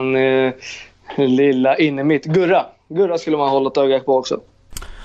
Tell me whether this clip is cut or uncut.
uncut